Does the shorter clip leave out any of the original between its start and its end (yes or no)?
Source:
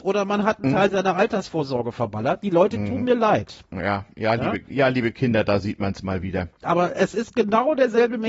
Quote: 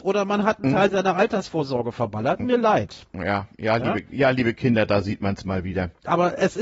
yes